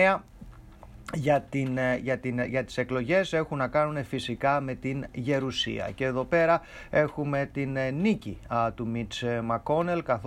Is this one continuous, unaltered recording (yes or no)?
yes